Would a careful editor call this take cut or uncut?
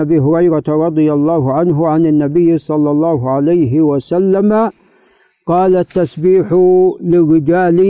uncut